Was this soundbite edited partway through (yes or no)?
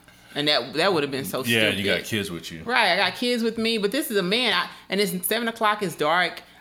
no